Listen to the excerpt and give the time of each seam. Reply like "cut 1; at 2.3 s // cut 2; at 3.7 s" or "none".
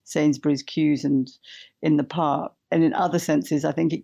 cut 1; at 2.6 s